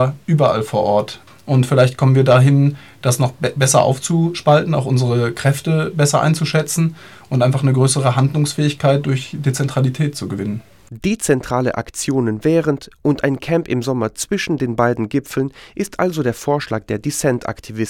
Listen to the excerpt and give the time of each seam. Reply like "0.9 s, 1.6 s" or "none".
none